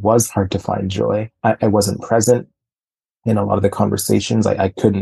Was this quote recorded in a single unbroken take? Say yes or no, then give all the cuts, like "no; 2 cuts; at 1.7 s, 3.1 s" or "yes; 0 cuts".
yes; 0 cuts